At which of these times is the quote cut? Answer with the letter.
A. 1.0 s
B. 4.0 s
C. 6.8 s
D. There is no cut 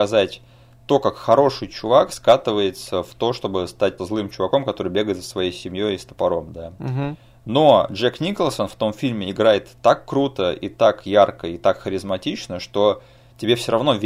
B